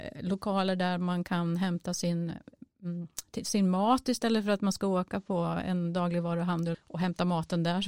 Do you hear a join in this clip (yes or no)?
yes